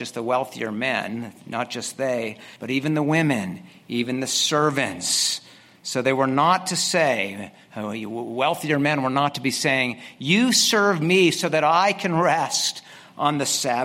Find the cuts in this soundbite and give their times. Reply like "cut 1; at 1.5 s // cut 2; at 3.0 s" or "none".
cut 1; at 2.6 s